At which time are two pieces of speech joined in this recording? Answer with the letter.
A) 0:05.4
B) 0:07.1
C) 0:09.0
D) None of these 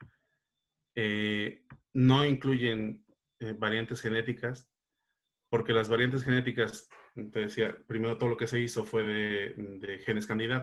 D